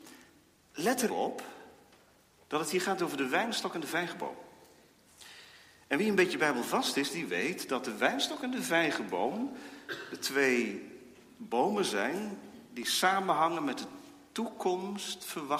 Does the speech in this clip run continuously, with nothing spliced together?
no; 1 cut; at 1.1 s

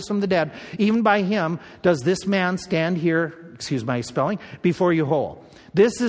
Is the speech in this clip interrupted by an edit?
no; 0 cuts

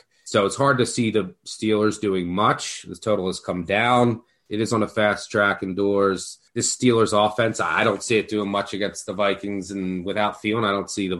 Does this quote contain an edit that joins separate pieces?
yes; 1 cut; at 6.5 s

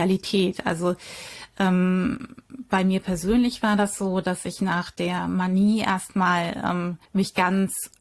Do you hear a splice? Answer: yes; 1 cut; at 7.1 s

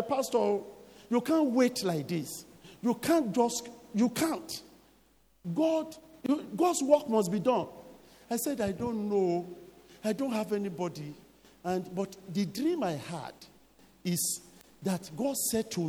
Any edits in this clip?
no; 0 cuts

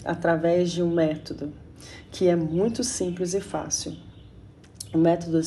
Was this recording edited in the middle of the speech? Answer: no; 0 cuts

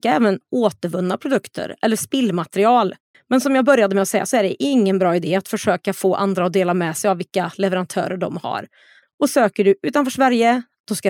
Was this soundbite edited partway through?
yes; 2 cuts; at 3.1 s, 9.0 s

